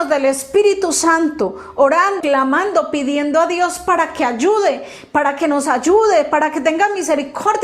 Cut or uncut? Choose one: cut